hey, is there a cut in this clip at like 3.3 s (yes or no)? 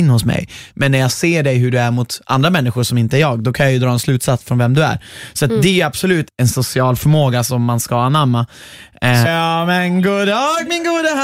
no